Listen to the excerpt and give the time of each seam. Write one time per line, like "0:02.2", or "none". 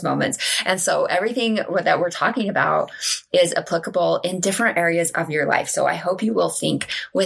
none